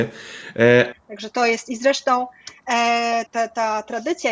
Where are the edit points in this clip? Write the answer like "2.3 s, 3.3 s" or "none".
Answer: 0.9 s, 3.3 s